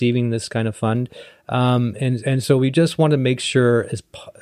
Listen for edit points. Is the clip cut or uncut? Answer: uncut